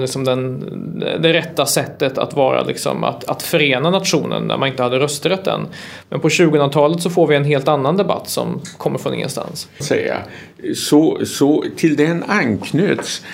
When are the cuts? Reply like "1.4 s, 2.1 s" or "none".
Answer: 9.8 s